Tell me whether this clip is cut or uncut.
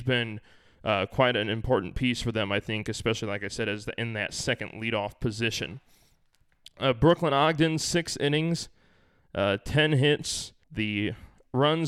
cut